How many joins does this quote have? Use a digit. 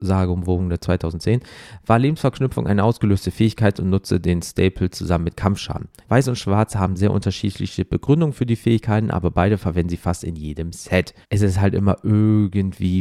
2